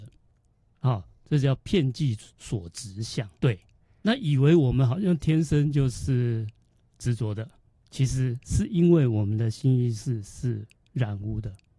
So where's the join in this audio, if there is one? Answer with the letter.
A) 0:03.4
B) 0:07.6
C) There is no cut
A